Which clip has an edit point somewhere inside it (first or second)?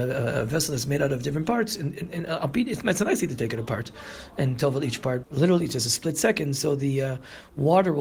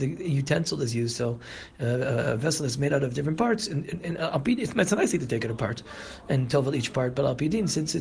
first